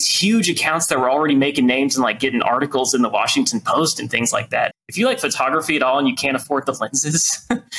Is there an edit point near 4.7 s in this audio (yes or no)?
yes